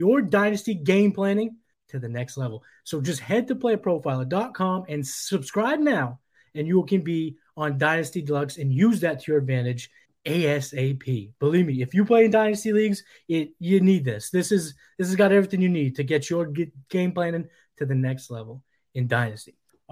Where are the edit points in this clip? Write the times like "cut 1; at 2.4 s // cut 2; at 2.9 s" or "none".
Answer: none